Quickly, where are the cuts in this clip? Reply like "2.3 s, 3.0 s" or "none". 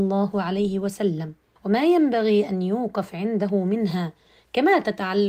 1.6 s

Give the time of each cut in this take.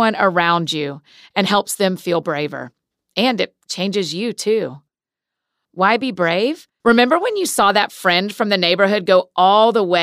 5.7 s, 6.8 s

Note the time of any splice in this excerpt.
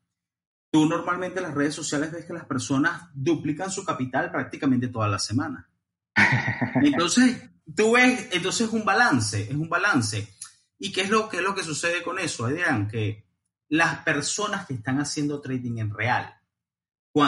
none

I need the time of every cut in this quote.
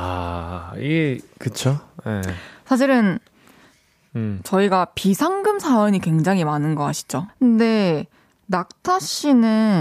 7.3 s

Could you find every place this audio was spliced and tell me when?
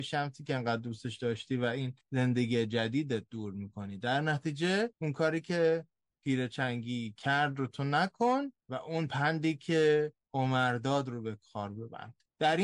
4.9 s

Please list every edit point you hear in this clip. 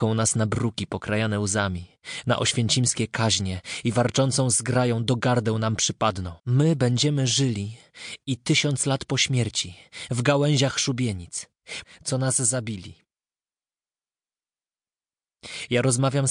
6.4 s, 11.8 s

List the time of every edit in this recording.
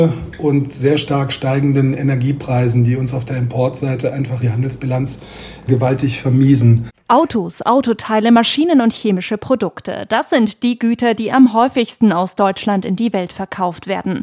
4.4 s, 6.9 s

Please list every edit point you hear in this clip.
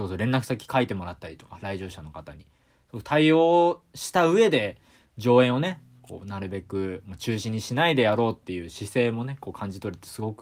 none

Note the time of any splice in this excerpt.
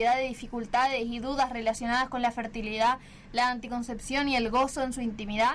none

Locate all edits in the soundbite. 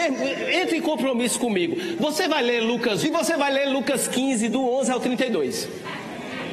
3.0 s

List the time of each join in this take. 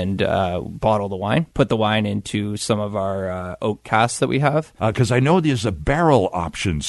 1.5 s, 4.8 s

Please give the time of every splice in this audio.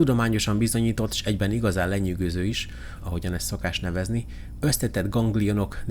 3.0 s, 4.6 s

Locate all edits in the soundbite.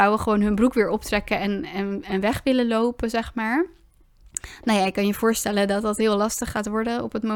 none

